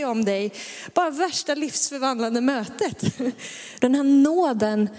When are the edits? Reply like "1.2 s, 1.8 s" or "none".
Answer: 3.8 s